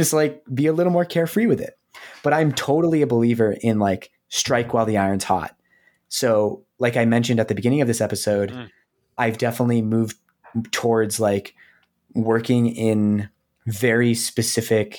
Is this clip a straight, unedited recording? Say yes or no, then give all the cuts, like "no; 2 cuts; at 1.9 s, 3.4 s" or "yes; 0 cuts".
yes; 0 cuts